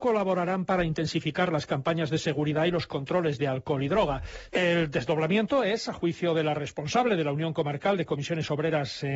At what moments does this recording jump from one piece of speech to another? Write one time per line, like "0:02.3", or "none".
0:04.5